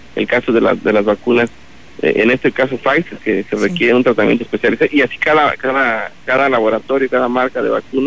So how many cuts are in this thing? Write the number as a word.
one